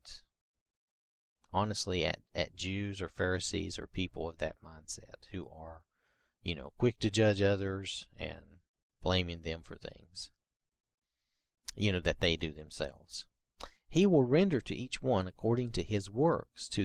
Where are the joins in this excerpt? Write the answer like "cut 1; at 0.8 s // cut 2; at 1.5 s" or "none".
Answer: none